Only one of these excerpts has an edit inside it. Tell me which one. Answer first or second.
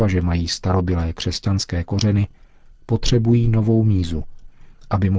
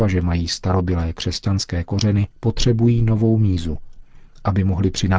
second